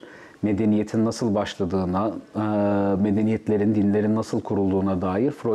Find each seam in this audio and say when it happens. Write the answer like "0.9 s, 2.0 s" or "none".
none